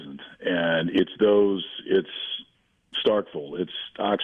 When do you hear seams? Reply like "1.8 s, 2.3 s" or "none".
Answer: none